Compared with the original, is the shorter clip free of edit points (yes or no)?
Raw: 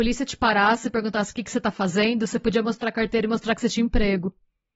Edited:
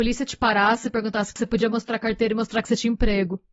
no